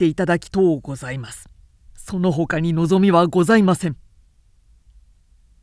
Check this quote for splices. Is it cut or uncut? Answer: uncut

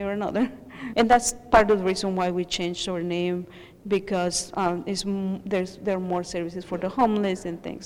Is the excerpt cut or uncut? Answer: cut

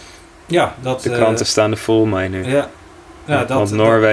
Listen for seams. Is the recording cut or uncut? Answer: uncut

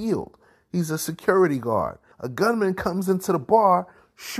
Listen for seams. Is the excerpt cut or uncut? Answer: cut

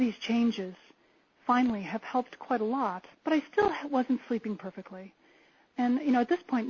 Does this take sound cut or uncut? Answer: cut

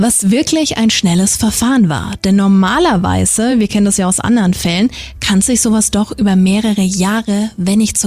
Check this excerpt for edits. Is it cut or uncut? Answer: uncut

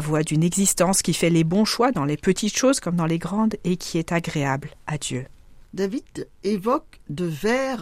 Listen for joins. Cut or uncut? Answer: cut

